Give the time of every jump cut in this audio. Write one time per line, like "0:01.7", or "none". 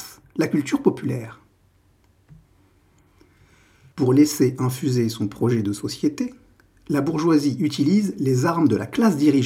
0:03.9